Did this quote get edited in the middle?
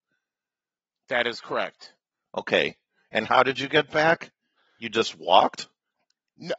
no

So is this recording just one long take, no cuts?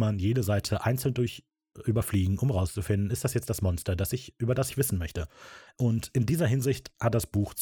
no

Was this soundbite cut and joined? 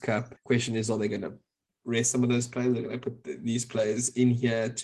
no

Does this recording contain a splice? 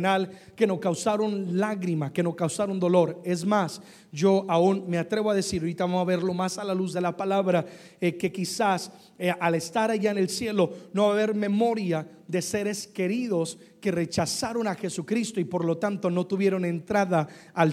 no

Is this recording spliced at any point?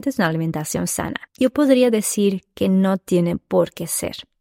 no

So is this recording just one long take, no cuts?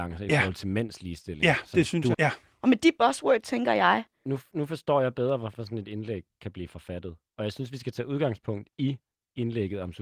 no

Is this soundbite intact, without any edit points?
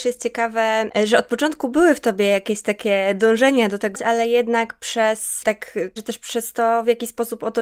no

